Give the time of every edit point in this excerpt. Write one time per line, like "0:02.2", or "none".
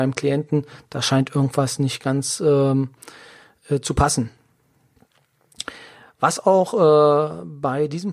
none